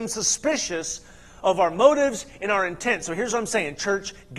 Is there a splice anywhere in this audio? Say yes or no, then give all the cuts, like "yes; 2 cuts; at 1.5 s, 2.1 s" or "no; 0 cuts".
no; 0 cuts